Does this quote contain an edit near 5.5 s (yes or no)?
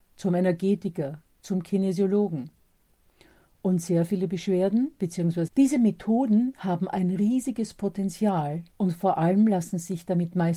yes